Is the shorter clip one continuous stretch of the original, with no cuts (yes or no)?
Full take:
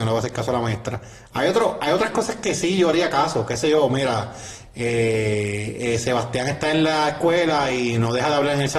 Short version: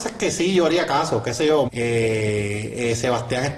no